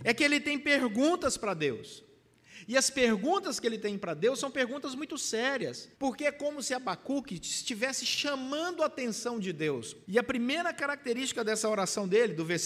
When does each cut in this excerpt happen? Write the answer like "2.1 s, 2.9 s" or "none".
5.9 s, 10.0 s